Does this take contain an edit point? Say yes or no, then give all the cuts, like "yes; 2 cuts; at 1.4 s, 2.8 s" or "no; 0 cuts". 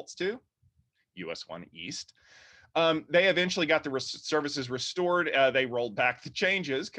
no; 0 cuts